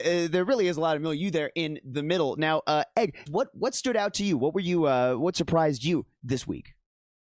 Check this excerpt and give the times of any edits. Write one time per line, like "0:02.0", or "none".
0:03.3